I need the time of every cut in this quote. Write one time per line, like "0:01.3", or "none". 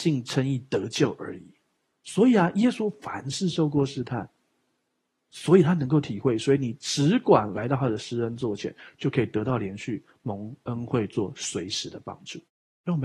0:01.9